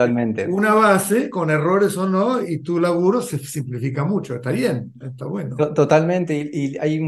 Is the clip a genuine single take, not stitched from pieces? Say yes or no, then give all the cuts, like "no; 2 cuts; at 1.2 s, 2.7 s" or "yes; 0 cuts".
yes; 0 cuts